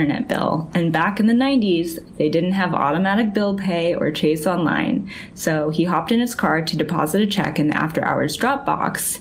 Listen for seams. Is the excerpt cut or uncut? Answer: uncut